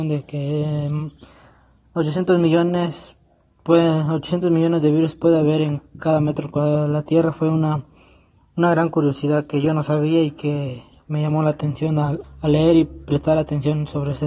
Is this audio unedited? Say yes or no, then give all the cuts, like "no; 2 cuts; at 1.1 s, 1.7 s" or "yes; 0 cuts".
no; 1 cut; at 12.2 s